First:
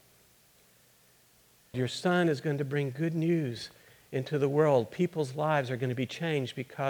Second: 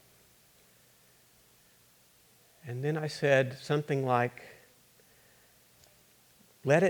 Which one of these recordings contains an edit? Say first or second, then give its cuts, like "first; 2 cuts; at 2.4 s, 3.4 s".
first; 1 cut; at 1.7 s